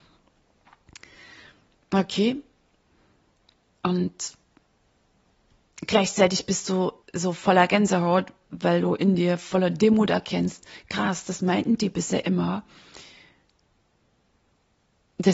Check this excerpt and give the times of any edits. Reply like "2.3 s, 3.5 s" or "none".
7.0 s